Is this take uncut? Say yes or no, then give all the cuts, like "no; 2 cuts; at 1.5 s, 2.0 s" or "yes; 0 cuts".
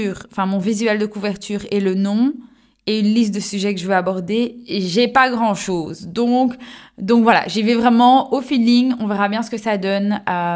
yes; 0 cuts